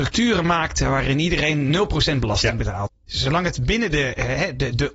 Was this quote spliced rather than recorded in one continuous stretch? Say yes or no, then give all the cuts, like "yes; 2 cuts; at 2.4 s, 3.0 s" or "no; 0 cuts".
yes; 1 cut; at 2.9 s